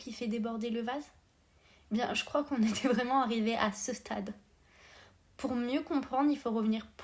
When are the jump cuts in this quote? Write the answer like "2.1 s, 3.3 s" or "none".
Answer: none